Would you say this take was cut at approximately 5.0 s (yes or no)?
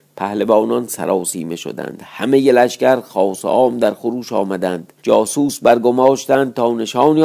yes